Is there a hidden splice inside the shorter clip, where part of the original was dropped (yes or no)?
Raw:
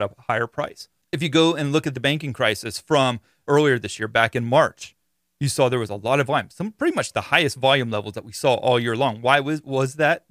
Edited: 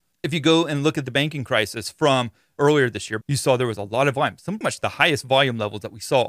yes